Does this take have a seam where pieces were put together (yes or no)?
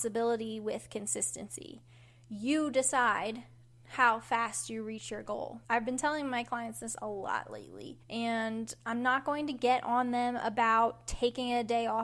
yes